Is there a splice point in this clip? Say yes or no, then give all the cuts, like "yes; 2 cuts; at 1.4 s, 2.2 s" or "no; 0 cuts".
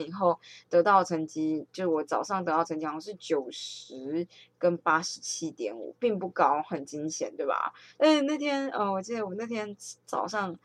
yes; 1 cut; at 8.0 s